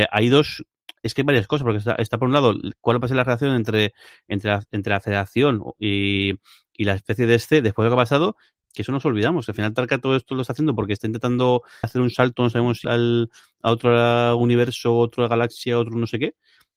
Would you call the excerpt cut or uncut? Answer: cut